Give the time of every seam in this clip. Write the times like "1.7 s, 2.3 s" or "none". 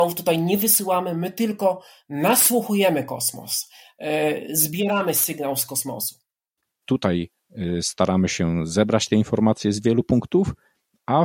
6.8 s

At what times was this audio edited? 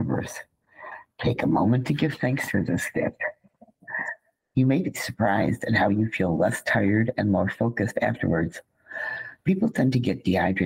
none

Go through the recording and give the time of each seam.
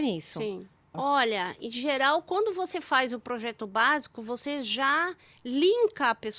0.9 s

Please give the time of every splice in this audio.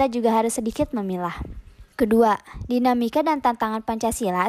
1.9 s

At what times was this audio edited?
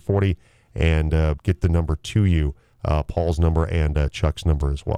1.4 s

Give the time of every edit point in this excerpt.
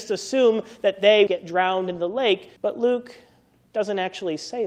1.3 s, 2.6 s

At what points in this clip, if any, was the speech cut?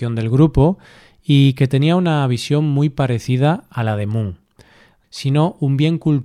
5.0 s

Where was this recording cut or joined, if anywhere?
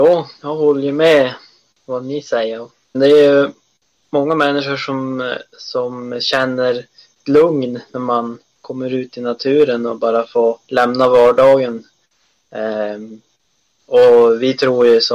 2.9 s, 10.6 s

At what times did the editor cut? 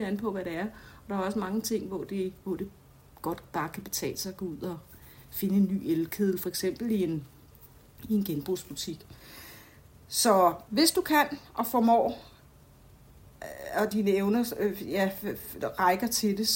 2.4 s, 10.7 s

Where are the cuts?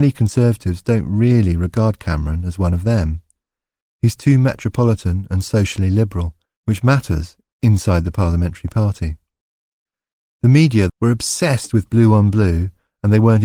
6.5 s, 10.9 s

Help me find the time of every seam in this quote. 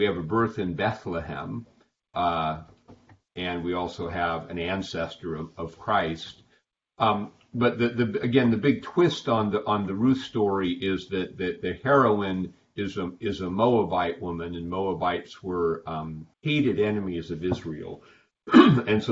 16.3 s

